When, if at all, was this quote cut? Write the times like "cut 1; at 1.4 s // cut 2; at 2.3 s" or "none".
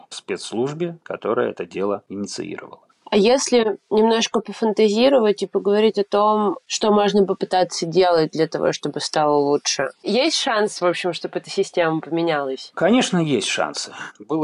none